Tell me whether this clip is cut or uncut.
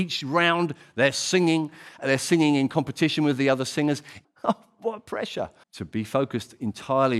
cut